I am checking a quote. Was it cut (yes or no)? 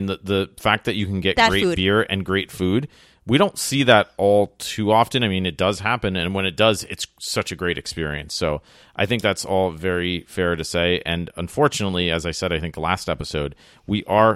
no